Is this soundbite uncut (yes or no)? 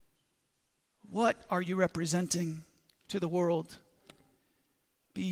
yes